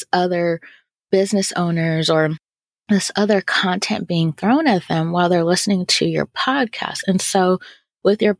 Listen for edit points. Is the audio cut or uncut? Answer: uncut